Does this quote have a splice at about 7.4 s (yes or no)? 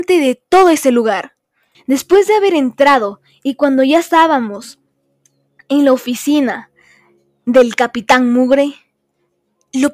no